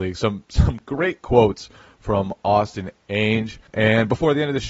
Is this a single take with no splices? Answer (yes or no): no